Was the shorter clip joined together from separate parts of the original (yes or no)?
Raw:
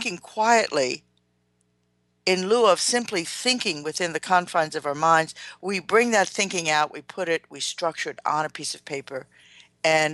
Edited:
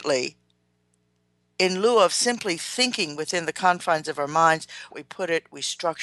yes